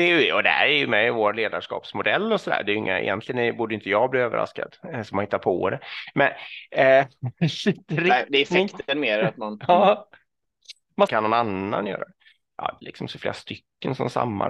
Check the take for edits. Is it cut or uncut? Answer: cut